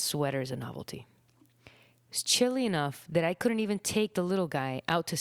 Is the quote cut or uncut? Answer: uncut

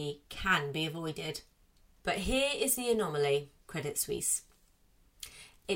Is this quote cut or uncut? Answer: cut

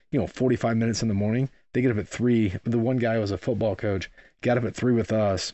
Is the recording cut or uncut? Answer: uncut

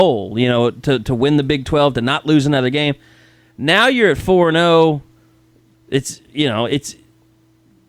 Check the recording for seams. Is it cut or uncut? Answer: cut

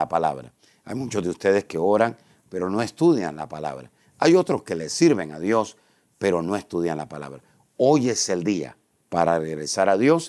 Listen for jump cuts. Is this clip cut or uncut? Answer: uncut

